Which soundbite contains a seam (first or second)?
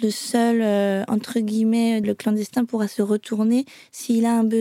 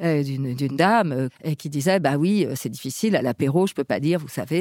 first